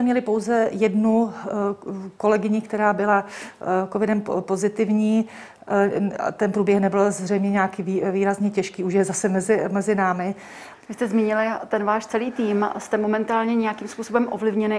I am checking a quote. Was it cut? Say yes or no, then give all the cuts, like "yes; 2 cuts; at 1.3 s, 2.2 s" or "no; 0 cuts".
yes; 1 cut; at 10.7 s